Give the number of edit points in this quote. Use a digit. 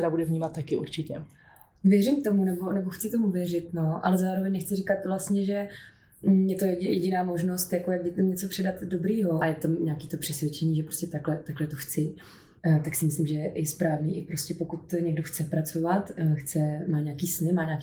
1